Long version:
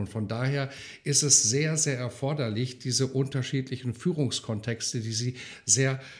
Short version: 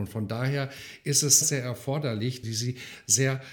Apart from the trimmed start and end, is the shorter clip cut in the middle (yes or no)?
yes